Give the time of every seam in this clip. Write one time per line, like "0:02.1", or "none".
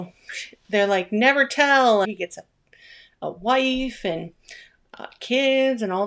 0:02.0